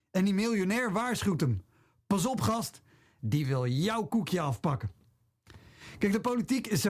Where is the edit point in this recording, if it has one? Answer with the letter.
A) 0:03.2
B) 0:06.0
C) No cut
A